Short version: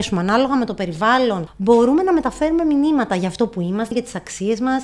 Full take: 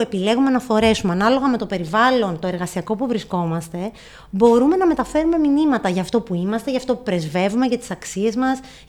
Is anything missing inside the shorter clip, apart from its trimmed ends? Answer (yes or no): yes